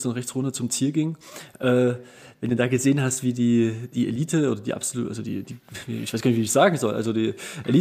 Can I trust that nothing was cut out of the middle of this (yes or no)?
yes